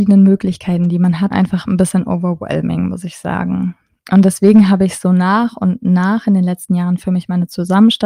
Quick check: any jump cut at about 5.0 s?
no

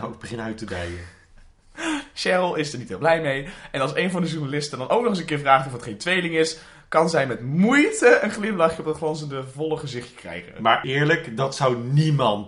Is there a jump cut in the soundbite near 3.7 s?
no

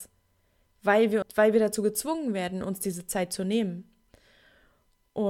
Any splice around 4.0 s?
no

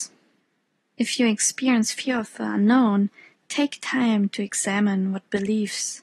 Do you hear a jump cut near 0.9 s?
yes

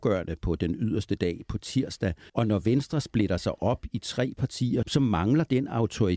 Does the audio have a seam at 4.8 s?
yes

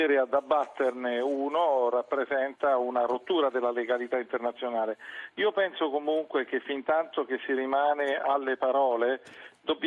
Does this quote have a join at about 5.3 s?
no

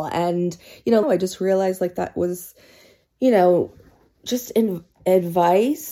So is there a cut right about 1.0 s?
yes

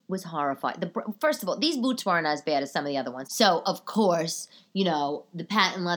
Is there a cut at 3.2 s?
yes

